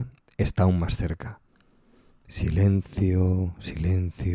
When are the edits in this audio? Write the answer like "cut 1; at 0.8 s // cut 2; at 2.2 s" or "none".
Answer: none